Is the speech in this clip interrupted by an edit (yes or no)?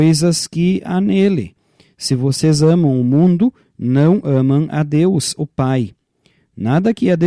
no